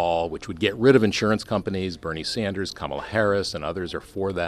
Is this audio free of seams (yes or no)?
yes